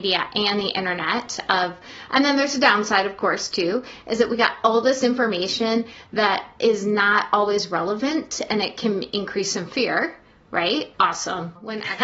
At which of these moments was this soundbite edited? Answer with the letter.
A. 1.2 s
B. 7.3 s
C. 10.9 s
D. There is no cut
C